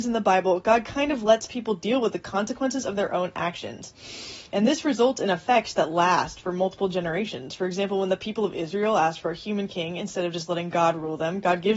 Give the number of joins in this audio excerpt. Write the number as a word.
zero